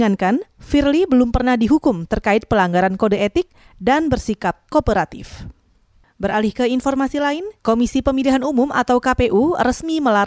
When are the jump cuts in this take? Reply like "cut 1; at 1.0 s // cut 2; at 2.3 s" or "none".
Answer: cut 1; at 7.6 s